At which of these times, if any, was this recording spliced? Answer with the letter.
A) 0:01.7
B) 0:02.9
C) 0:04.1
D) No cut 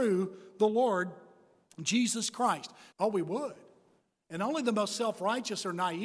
B